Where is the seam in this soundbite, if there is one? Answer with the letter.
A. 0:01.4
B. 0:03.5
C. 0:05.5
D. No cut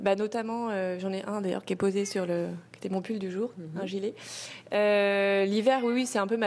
B